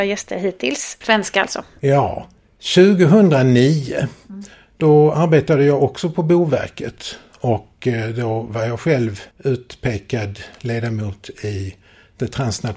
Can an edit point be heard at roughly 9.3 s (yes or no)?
yes